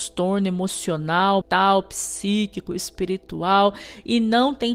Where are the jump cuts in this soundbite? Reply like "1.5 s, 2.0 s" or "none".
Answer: 1.4 s

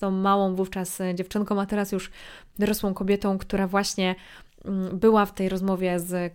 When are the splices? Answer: none

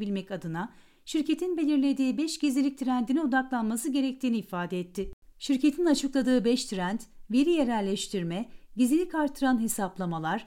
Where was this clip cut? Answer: none

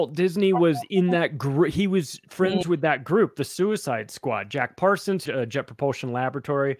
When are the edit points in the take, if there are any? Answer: 5.3 s

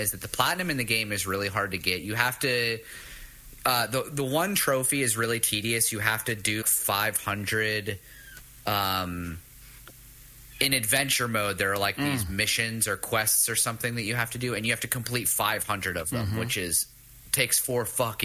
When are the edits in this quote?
6.6 s

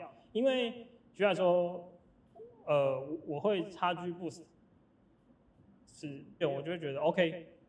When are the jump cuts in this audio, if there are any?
6.4 s

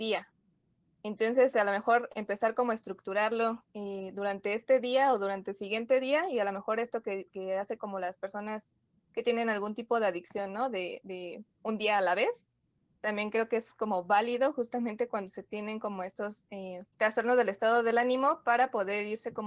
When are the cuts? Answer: 16.9 s

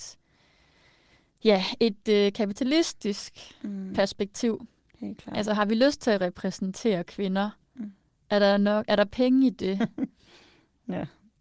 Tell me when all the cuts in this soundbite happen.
none

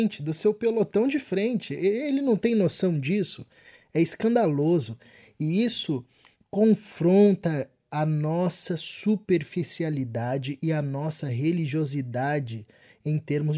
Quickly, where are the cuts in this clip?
none

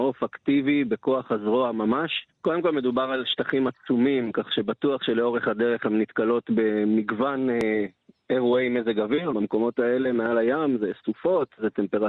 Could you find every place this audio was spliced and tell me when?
2.3 s, 9.3 s

